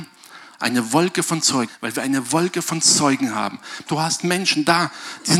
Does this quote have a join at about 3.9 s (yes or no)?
yes